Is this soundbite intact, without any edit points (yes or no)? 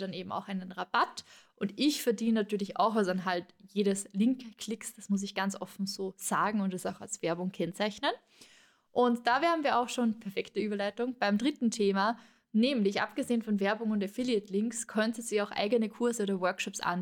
yes